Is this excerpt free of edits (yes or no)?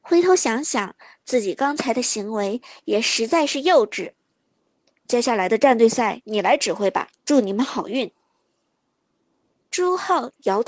no